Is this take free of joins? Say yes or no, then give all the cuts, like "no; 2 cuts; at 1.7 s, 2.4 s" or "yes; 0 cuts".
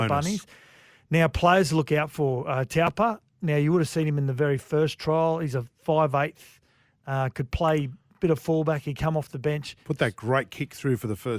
yes; 0 cuts